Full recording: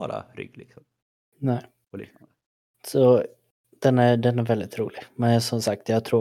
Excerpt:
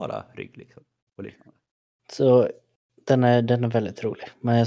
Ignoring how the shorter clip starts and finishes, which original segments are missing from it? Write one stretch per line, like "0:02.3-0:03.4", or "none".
0:01.1-0:01.8